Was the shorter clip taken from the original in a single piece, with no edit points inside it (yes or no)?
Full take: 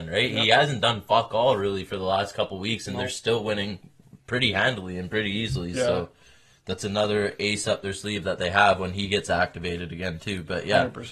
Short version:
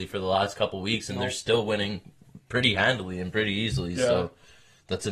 yes